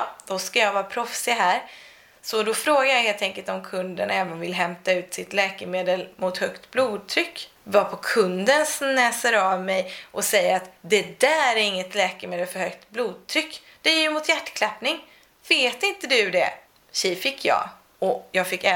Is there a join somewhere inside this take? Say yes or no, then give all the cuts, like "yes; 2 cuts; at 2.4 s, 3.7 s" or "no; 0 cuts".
no; 0 cuts